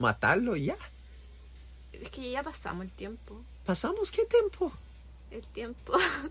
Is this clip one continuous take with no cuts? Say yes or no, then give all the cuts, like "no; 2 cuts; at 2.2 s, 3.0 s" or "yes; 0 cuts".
yes; 0 cuts